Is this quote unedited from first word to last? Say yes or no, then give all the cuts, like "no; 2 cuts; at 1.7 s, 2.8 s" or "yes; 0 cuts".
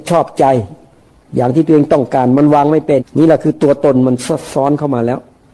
no; 1 cut; at 3.0 s